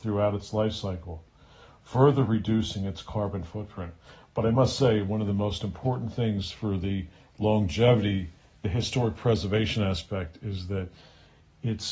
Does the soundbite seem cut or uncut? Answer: uncut